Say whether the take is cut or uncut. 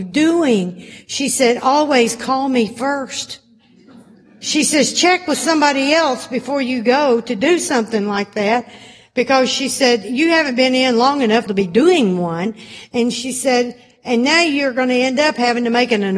cut